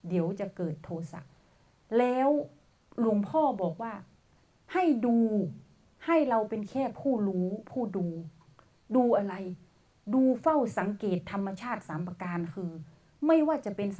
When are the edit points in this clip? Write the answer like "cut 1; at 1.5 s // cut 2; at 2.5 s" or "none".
none